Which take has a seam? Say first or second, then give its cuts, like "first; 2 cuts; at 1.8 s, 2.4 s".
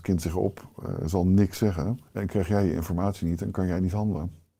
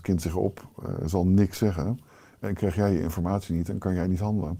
first; 1 cut; at 2.1 s